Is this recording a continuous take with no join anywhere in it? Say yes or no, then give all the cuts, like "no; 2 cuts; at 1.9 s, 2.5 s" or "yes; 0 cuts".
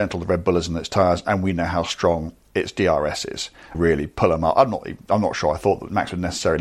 no; 1 cut; at 3.7 s